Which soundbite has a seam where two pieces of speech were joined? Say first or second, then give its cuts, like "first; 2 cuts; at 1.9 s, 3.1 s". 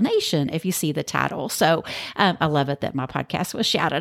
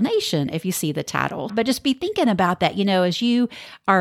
second; 1 cut; at 1.5 s